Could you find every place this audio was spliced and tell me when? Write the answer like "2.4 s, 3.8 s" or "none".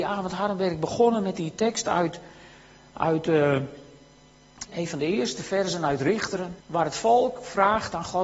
4.7 s, 6.6 s